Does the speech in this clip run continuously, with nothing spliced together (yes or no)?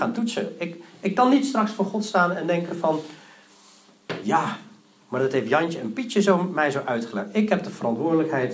yes